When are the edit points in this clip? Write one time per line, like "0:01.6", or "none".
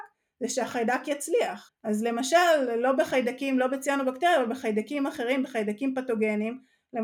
0:01.7